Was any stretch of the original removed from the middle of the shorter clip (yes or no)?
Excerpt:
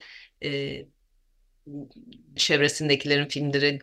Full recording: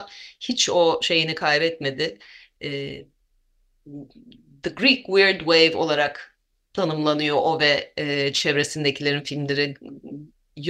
yes